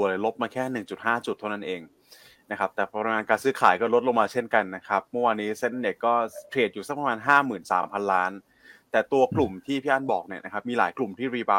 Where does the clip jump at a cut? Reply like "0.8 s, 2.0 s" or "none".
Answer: none